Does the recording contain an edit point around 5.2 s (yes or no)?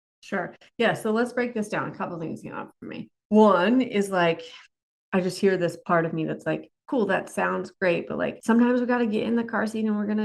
no